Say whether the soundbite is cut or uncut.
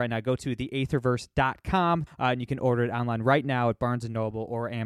cut